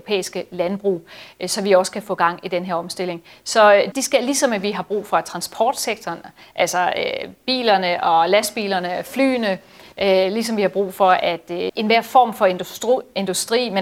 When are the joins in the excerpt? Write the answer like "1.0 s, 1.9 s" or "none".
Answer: 3.9 s, 11.7 s